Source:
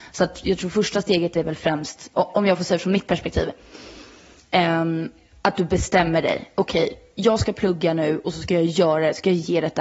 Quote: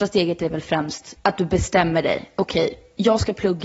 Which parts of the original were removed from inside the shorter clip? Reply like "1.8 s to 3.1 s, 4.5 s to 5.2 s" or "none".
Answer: 2.1 s to 5.4 s